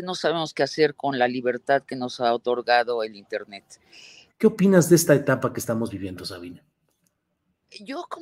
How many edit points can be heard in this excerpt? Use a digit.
1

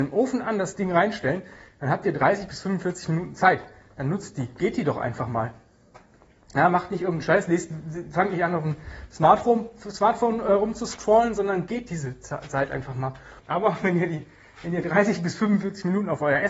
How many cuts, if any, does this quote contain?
1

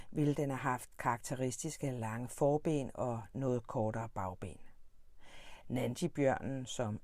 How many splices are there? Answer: 1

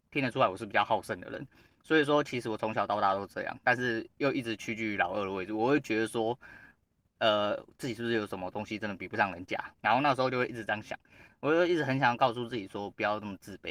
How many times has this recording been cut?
1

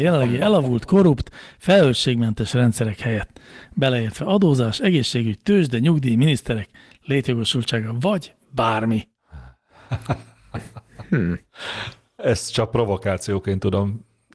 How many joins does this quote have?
0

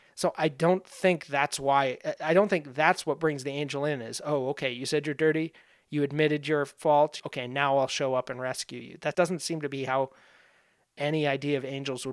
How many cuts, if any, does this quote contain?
2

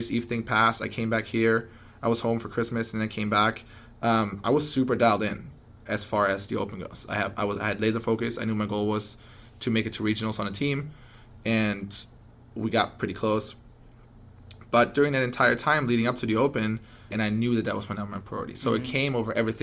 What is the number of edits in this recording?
1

